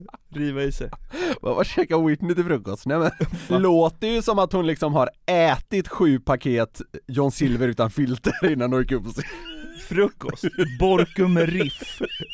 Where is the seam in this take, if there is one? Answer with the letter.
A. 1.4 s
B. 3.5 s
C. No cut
B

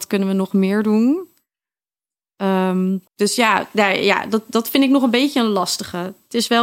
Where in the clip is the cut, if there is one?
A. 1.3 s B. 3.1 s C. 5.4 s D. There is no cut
B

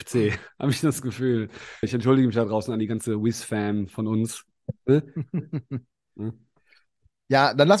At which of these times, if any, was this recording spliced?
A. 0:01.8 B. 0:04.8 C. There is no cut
A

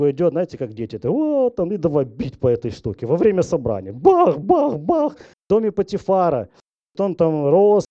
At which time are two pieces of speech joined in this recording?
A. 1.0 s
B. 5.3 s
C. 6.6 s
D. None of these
B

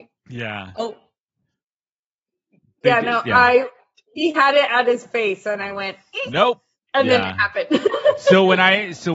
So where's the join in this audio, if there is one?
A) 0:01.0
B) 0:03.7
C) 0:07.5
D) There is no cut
D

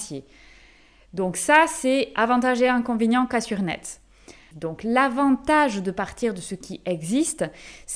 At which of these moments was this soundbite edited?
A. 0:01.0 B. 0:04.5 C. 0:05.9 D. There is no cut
B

